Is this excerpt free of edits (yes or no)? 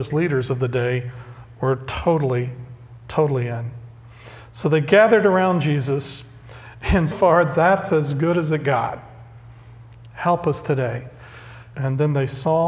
no